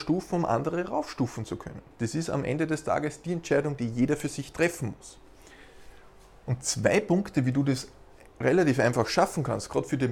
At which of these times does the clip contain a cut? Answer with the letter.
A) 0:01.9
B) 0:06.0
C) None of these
A